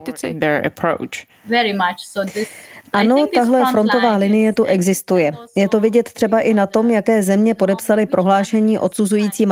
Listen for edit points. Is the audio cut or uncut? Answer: uncut